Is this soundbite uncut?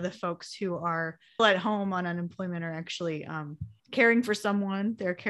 no; 2 cuts; at 1.4 s, 3.8 s

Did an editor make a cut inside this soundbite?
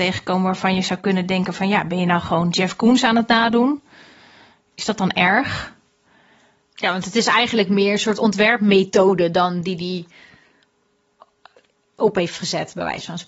no; 0 cuts

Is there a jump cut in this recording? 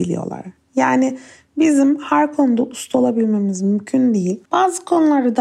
yes; 1 cut; at 4.5 s

